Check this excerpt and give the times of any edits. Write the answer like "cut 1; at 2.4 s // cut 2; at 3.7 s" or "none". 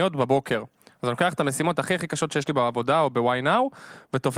none